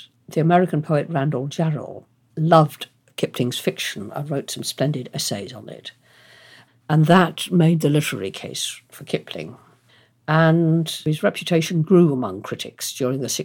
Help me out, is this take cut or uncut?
cut